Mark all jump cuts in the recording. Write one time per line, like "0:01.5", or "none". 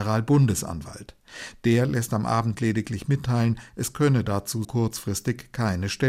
0:04.6